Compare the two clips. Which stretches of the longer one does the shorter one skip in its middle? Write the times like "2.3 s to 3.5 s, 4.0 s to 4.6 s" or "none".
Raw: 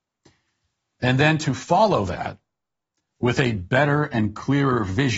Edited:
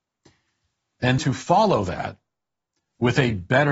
1.2 s to 1.4 s